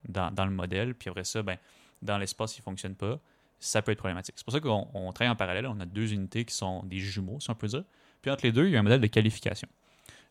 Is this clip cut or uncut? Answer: uncut